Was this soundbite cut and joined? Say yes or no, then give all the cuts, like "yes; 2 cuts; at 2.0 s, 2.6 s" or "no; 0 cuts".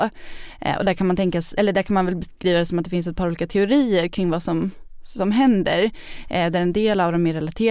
no; 0 cuts